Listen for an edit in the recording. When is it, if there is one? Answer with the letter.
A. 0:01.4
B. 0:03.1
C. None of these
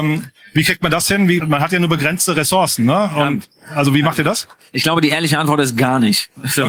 A